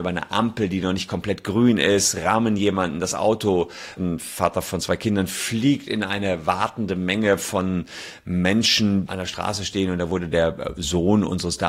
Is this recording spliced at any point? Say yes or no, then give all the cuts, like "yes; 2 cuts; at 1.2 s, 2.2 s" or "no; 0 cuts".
yes; 2 cuts; at 4.0 s, 9.1 s